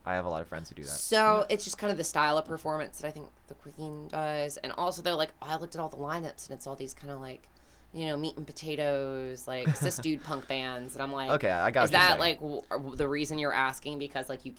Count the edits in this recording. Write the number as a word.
zero